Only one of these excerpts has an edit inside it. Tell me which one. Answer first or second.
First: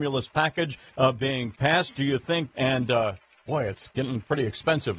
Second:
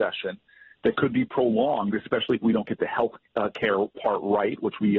first